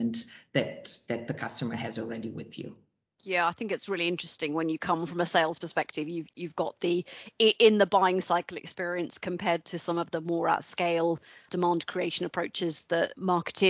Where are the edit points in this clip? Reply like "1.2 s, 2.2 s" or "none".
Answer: none